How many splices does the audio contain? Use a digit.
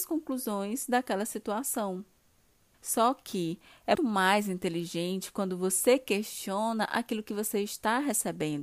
2